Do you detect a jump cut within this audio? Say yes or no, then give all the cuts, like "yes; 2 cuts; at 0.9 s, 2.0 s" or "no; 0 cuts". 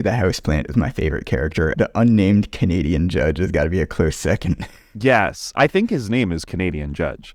yes; 1 cut; at 1.7 s